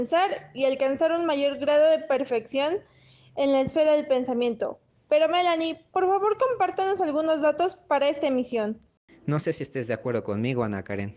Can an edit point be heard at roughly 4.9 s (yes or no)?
no